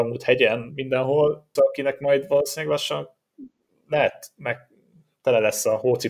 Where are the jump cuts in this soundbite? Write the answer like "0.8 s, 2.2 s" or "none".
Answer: 1.6 s